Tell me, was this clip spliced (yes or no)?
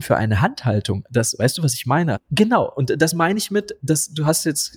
yes